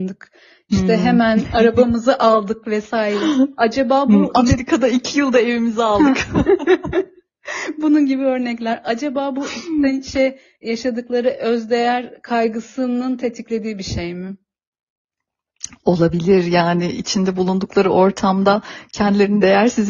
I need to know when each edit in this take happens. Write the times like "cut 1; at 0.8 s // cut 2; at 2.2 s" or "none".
none